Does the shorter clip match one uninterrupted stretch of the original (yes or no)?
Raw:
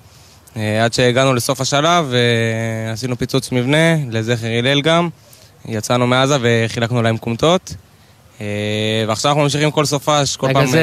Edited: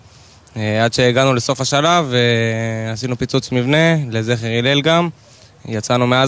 yes